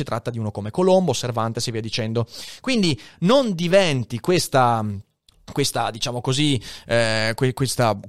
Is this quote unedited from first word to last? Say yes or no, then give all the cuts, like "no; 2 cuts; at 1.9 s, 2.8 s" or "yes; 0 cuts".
yes; 0 cuts